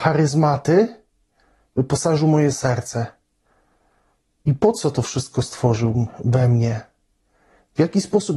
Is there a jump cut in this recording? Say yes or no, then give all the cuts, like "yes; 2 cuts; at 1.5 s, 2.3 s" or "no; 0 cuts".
no; 0 cuts